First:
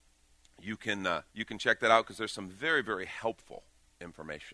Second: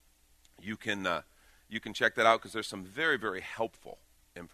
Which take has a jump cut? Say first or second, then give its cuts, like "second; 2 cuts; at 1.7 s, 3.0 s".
first; 1 cut; at 1.3 s